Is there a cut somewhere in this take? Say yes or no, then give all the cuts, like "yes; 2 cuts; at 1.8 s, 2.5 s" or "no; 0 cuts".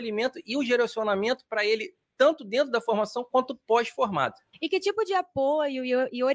yes; 1 cut; at 4.5 s